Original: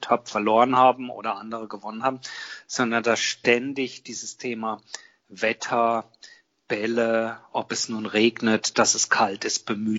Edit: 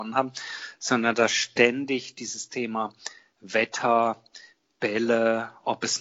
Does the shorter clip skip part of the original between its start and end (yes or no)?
no